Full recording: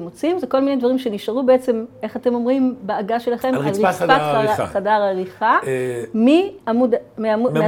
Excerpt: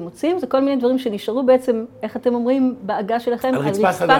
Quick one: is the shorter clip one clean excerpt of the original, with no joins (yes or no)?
yes